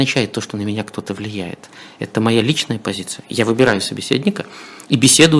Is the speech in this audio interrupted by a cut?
no; 0 cuts

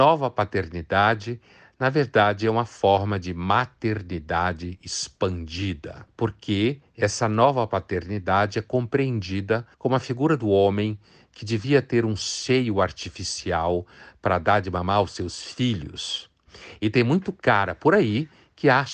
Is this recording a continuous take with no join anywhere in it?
no; 1 cut; at 9.7 s

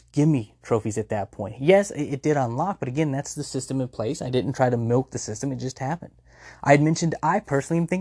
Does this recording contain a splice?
yes; 1 cut; at 1.5 s

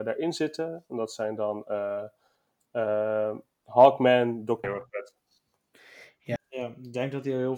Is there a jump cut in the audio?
yes; 2 cuts; at 4.6 s, 6.4 s

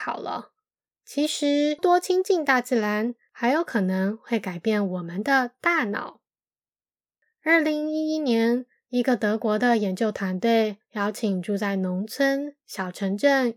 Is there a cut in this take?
yes; 1 cut; at 1.8 s

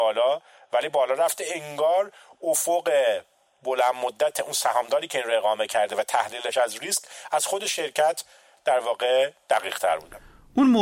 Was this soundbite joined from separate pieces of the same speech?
no; 0 cuts

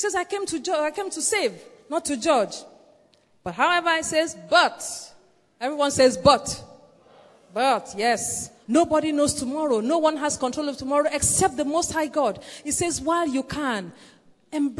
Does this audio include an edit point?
yes; 1 cut; at 8.6 s

